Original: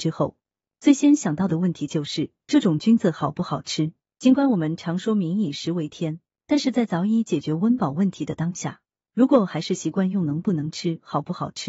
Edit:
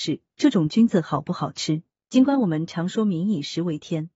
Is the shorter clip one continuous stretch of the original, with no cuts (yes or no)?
yes